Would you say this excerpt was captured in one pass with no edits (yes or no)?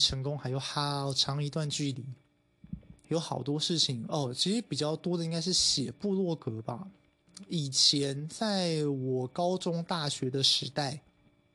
no